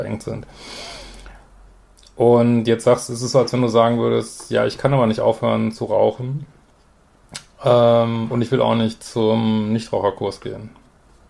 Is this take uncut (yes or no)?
yes